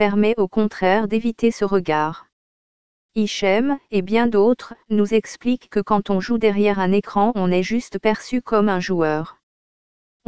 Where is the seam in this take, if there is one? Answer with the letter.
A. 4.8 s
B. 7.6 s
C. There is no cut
C